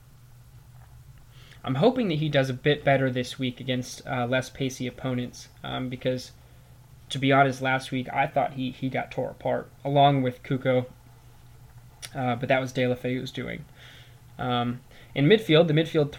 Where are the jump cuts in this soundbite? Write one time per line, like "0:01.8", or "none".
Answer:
0:01.6